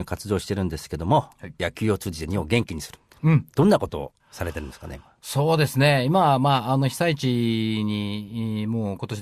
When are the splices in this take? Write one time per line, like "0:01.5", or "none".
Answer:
0:04.2